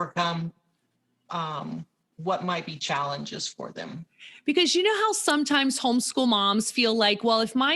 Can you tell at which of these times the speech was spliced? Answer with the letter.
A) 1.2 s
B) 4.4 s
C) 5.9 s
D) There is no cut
D